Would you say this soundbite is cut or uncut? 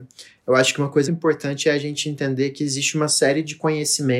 cut